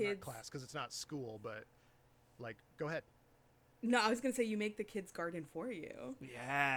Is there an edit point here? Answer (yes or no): no